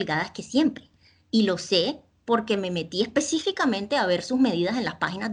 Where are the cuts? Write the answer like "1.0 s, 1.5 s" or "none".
none